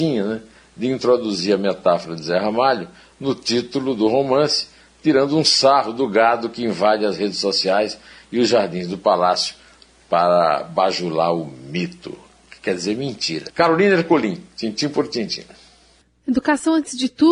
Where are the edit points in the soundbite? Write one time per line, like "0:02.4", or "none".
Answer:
0:13.5